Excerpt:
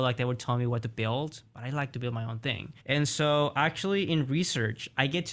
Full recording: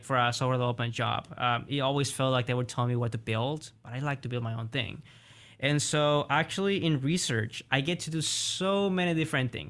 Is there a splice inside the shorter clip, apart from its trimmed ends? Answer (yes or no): yes